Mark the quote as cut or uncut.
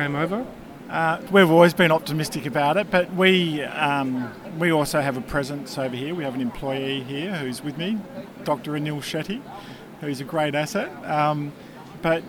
cut